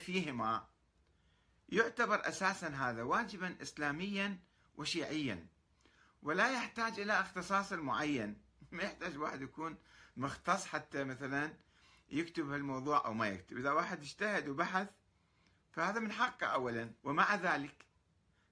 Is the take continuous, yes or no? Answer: no